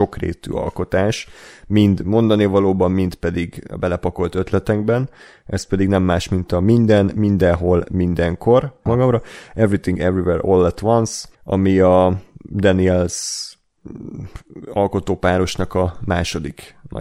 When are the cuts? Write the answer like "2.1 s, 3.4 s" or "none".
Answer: 8.9 s, 11.3 s